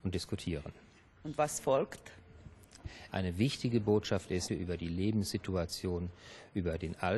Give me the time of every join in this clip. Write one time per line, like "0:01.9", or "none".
0:03.1
0:04.5